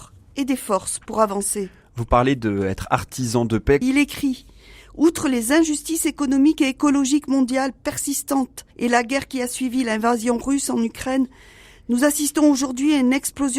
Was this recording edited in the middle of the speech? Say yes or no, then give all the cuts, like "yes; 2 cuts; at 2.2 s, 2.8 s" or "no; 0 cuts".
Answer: yes; 2 cuts; at 3.8 s, 8.7 s